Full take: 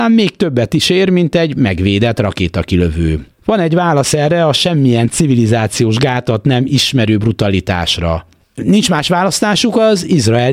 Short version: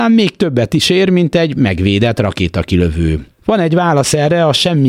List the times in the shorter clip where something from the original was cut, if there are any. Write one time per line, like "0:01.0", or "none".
none